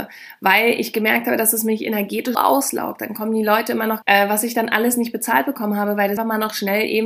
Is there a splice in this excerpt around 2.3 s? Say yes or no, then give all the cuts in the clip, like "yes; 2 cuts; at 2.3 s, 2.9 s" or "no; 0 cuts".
yes; 3 cuts; at 2.3 s, 4.0 s, 6.2 s